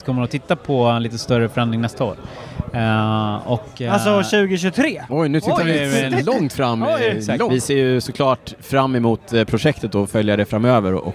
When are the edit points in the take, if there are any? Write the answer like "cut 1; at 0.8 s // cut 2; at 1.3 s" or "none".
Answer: cut 1; at 5.1 s // cut 2; at 7.5 s